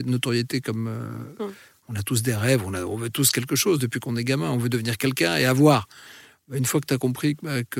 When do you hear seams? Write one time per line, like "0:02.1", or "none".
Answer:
0:01.8